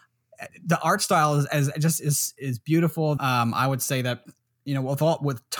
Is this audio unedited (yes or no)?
no